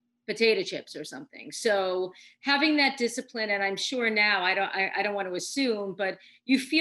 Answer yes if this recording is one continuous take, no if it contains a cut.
yes